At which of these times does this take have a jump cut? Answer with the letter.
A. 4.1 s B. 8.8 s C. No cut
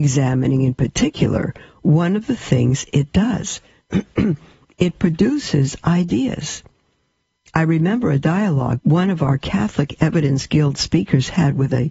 B